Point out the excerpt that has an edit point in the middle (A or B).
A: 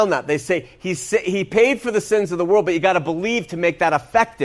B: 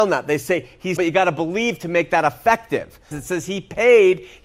B